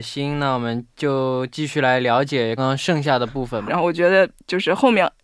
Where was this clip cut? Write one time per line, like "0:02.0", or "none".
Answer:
0:02.6
0:03.7